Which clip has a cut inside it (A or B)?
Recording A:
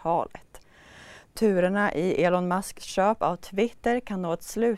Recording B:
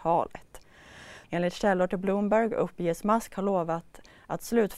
B